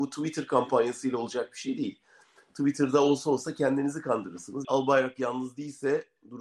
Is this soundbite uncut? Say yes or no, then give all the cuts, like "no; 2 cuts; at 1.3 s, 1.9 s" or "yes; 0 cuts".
no; 1 cut; at 4.6 s